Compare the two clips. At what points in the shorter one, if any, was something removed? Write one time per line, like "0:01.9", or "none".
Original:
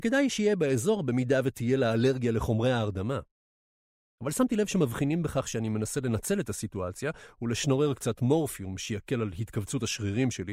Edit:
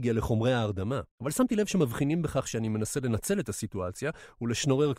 0:01.1